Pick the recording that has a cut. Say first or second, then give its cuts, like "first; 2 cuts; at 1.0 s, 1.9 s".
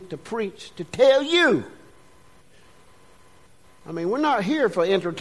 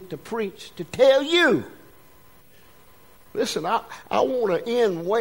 second; 1 cut; at 3.2 s